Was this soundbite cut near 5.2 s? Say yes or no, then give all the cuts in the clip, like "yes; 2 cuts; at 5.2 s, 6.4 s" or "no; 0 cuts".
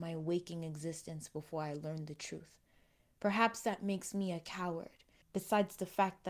yes; 1 cut; at 5.2 s